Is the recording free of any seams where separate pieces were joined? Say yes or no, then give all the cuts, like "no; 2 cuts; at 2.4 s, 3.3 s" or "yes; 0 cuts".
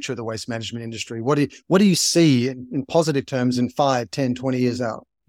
yes; 0 cuts